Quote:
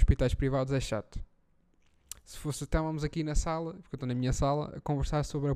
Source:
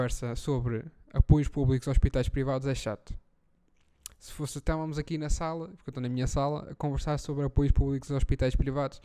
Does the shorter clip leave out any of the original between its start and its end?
no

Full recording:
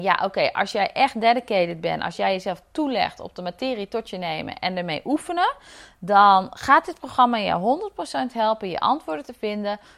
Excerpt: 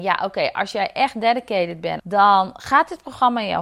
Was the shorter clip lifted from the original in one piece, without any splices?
no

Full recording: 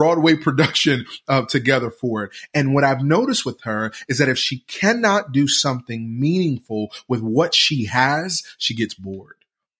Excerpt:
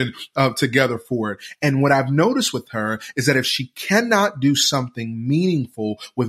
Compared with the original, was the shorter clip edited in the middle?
no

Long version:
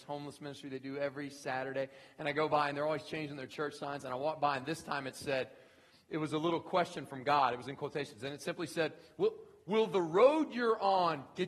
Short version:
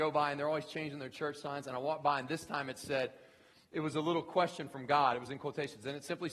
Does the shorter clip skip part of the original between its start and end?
no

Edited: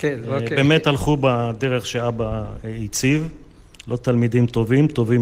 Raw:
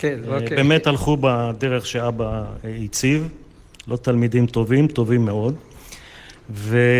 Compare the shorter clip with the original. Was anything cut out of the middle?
no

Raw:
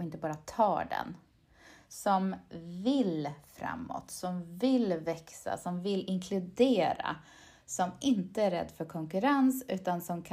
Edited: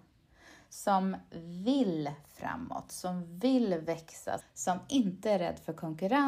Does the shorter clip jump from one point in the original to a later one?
yes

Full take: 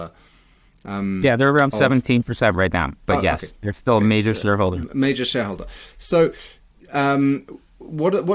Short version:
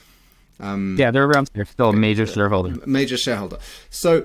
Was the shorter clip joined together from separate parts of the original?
yes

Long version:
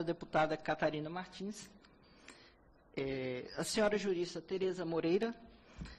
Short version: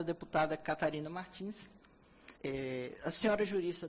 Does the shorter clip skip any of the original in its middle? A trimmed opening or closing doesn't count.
yes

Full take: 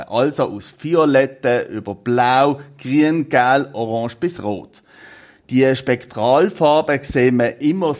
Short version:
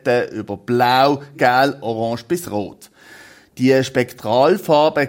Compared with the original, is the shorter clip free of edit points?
no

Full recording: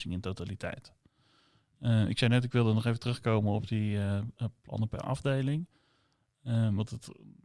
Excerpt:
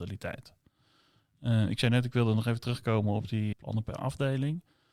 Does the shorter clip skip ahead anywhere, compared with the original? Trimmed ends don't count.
yes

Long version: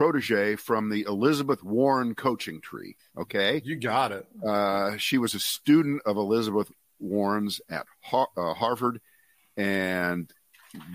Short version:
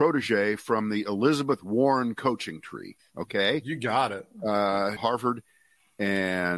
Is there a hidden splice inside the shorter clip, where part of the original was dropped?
yes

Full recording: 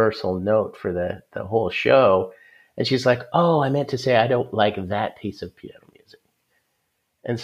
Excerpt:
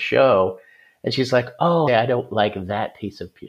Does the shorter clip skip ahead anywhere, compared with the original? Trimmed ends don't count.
yes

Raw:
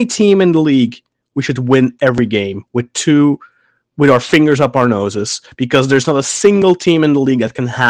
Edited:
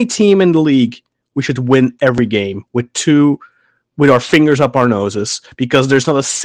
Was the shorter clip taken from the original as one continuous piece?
yes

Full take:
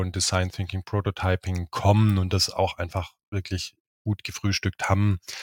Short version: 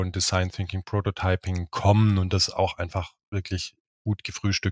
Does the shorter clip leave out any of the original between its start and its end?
no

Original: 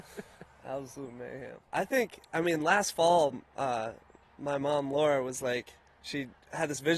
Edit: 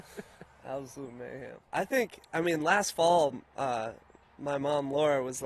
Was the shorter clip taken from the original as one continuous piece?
yes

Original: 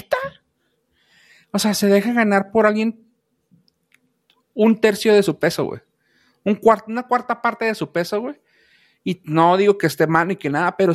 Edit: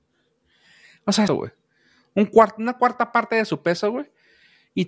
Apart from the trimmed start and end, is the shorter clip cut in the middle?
yes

